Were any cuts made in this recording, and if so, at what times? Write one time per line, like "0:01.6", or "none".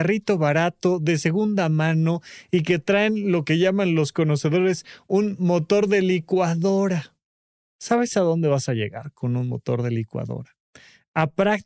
none

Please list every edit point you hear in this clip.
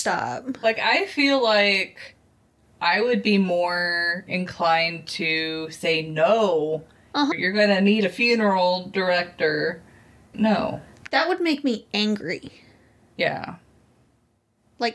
0:07.3
0:10.3

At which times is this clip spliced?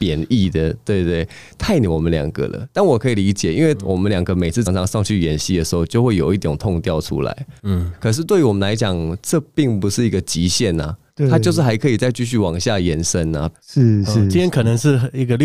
0:04.7
0:13.6

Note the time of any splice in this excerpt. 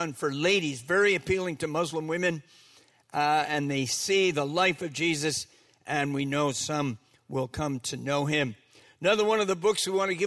none

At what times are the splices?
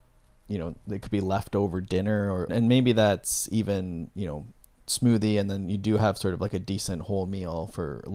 0:02.5

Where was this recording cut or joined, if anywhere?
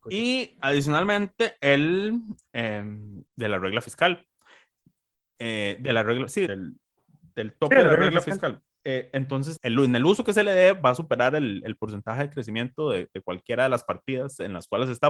0:03.3
0:06.5
0:09.6

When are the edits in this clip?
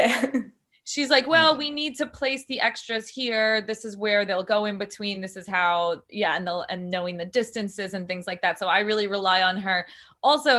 none

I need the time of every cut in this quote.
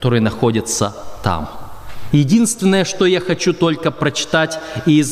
0:02.1

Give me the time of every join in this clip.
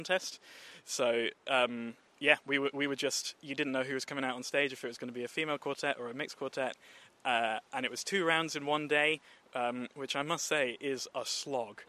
none

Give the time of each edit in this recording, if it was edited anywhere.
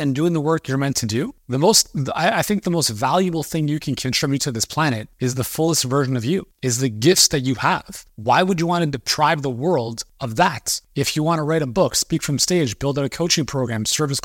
none

